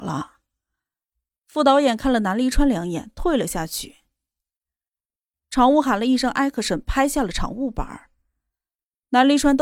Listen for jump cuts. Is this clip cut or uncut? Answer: uncut